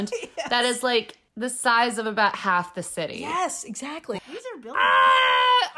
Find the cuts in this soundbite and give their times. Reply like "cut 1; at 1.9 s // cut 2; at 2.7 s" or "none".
cut 1; at 1.3 s // cut 2; at 4.2 s